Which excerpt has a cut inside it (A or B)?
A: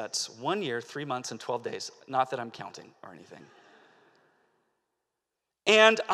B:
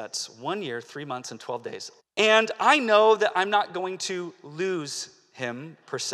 B